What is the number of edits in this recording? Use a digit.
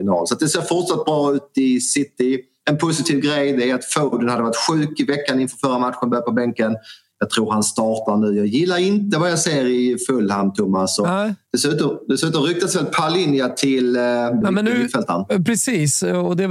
1